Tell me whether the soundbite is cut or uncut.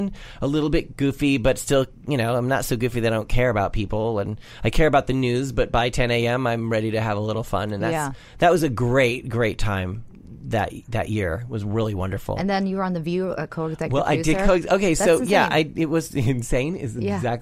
uncut